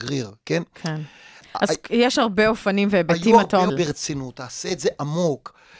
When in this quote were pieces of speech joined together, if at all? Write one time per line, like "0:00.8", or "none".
0:03.7